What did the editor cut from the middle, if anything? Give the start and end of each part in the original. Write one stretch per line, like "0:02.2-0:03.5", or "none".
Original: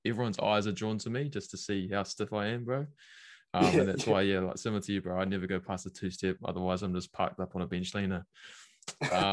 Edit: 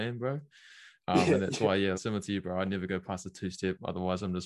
0:04.4-0:04.5